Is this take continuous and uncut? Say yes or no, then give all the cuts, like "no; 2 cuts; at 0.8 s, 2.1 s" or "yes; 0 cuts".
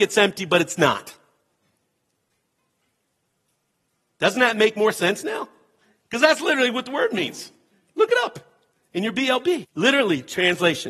no; 1 cut; at 9.6 s